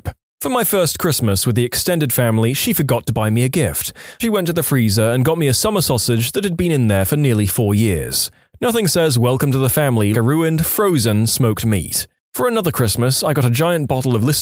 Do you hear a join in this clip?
yes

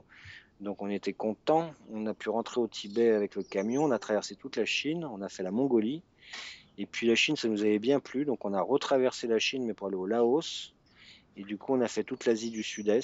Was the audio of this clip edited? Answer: no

